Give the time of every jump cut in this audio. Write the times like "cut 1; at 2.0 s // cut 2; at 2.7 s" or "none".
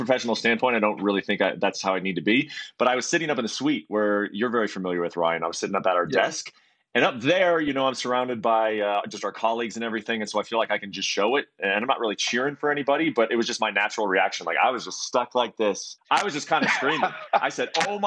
cut 1; at 16.0 s